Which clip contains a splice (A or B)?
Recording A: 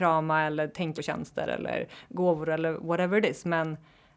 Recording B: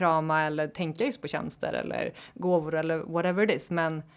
A